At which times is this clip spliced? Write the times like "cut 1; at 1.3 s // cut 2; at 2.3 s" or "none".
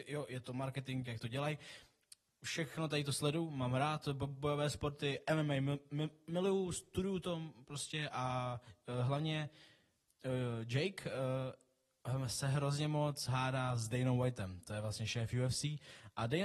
cut 1; at 1.0 s